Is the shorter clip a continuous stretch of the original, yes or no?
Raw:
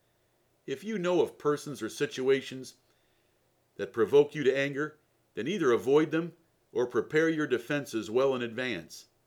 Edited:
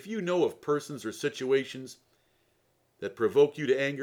yes